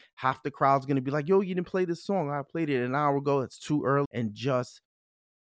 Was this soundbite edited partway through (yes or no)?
yes